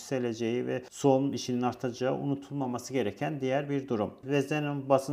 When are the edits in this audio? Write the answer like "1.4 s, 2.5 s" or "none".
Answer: 4.2 s